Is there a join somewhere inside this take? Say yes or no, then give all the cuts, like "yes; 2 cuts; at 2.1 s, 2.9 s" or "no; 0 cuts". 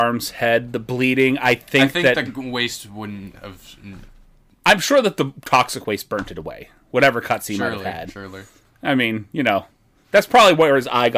no; 0 cuts